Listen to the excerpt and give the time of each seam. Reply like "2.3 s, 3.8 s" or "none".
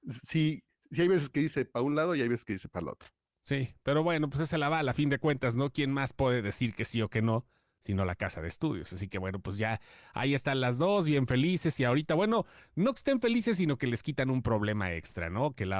none